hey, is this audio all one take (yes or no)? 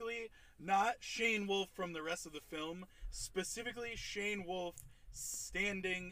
yes